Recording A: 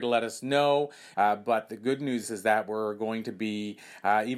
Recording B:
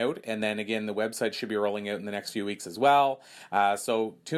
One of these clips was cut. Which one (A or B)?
A